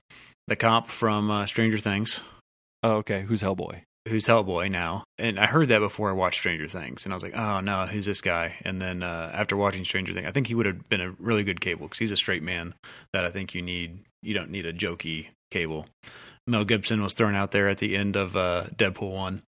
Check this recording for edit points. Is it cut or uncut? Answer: uncut